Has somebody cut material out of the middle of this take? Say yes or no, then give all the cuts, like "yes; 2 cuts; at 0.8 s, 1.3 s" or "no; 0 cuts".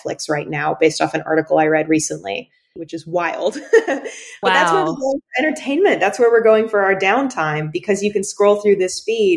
yes; 1 cut; at 2.8 s